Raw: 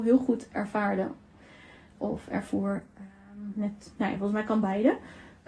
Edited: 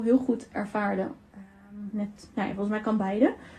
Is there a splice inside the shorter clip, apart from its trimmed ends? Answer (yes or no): yes